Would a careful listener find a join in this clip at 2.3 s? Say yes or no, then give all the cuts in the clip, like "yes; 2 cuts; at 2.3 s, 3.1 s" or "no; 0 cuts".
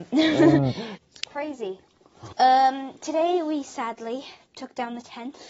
yes; 2 cuts; at 1.0 s, 2.3 s